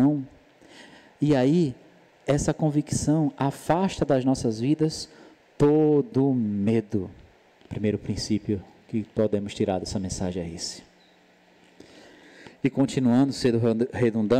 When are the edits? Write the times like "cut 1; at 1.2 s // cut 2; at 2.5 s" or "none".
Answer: cut 1; at 7.6 s